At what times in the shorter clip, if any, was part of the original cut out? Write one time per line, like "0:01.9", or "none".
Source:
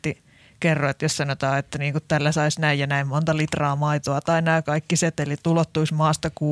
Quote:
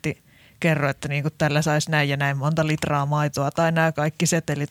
0:00.9